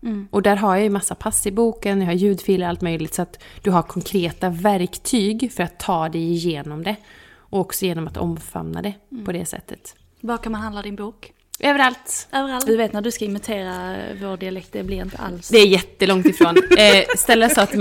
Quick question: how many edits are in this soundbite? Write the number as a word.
one